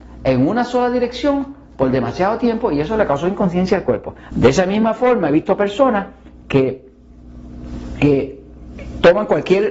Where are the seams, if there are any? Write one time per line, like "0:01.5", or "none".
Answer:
0:04.3